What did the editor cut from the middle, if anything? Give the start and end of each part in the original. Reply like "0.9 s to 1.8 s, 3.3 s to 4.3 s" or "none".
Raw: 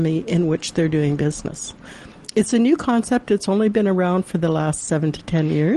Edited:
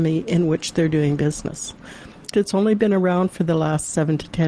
2.3 s to 3.3 s